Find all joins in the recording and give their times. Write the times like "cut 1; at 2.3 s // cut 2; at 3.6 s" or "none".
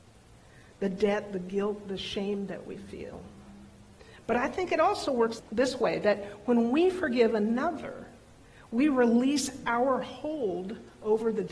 none